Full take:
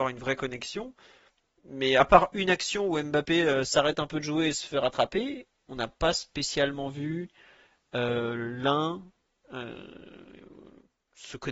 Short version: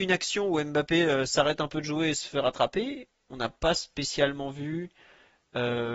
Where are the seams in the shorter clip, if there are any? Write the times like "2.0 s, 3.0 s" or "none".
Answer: none